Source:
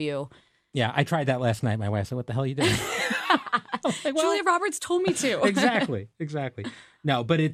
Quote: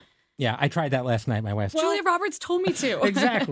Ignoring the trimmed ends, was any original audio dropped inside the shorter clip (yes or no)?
yes